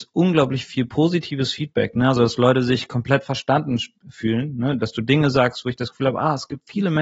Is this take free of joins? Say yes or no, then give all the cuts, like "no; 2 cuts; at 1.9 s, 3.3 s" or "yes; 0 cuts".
yes; 0 cuts